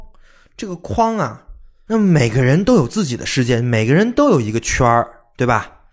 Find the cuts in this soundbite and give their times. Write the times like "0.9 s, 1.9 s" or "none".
1.9 s